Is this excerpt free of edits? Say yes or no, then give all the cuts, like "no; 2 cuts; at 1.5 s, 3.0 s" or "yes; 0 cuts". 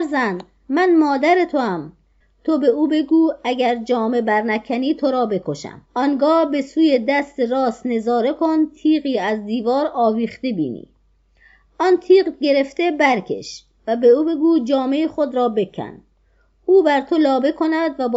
no; 2 cuts; at 2.2 s, 5.9 s